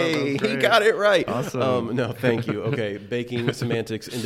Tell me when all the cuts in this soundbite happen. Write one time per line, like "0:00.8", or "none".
none